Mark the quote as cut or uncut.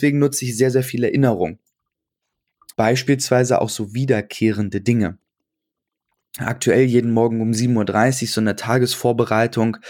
cut